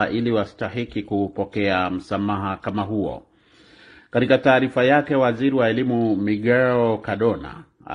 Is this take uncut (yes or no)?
yes